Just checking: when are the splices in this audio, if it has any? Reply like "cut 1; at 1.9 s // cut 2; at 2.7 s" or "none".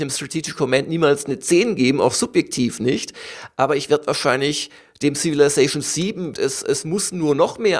cut 1; at 6.3 s